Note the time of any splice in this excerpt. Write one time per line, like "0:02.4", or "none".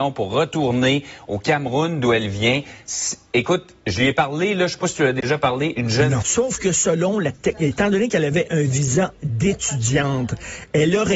0:06.2